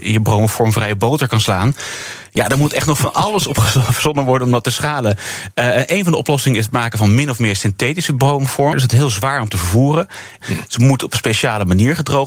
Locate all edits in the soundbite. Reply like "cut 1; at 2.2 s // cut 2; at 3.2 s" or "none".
cut 1; at 8.7 s // cut 2; at 10.4 s